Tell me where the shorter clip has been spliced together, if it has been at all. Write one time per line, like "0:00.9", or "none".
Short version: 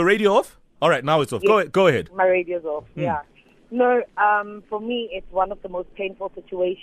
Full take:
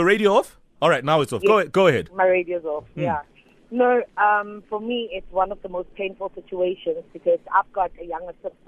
none